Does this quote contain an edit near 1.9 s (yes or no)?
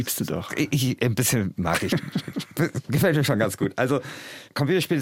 no